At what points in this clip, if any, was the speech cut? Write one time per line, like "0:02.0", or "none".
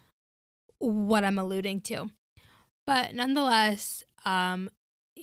none